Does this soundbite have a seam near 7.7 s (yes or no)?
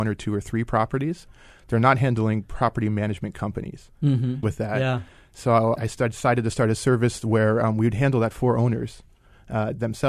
no